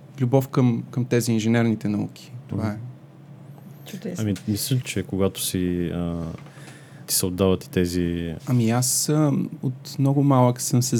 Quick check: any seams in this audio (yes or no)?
yes